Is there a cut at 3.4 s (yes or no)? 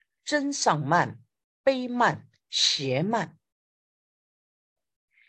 no